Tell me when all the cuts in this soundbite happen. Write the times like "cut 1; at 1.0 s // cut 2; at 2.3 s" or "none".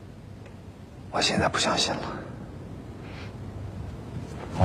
none